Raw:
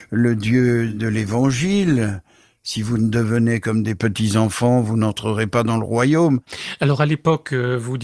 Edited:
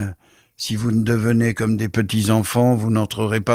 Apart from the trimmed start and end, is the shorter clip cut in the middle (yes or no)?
no